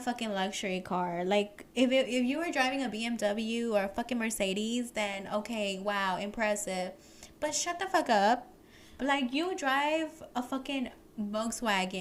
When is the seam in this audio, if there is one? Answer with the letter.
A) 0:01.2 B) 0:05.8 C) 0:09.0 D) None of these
C